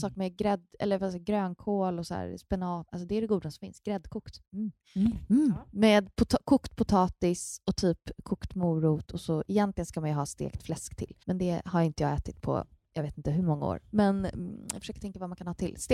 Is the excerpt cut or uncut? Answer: cut